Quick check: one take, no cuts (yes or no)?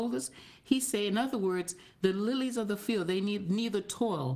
yes